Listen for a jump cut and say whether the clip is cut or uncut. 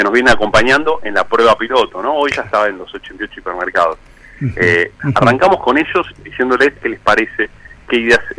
cut